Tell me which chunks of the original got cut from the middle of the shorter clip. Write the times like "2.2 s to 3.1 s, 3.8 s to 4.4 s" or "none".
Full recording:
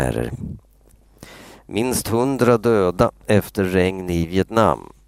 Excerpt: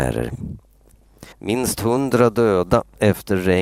1.3 s to 1.6 s